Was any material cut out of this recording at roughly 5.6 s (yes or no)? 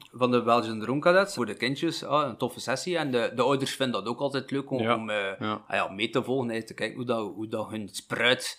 no